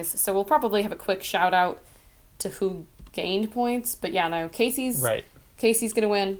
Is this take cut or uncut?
uncut